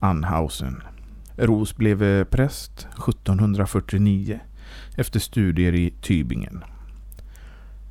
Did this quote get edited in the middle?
yes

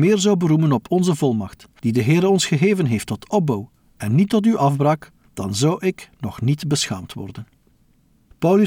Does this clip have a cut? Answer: no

